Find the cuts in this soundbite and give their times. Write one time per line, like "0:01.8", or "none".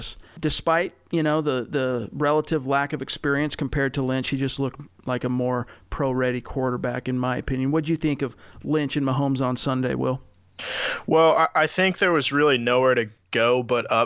none